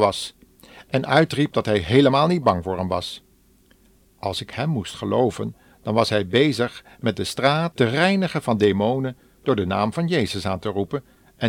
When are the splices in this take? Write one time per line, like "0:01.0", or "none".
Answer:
0:07.7